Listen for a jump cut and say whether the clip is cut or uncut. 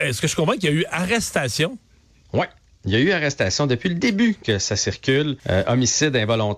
cut